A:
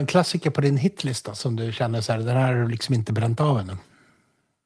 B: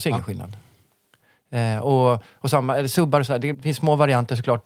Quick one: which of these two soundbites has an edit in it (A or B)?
B